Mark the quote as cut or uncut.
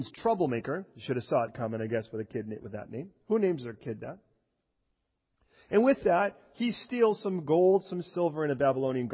uncut